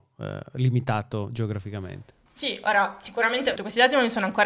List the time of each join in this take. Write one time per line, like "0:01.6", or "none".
0:02.3
0:03.6